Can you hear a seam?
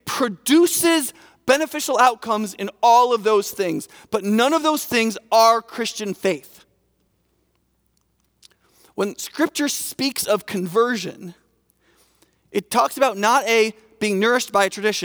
no; 0 cuts

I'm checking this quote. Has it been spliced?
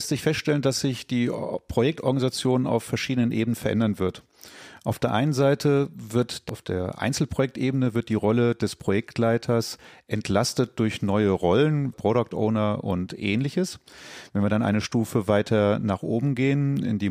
yes; 1 cut; at 11.9 s

